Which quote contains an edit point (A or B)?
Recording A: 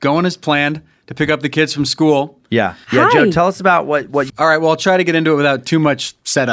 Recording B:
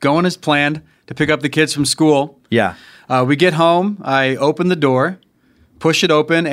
A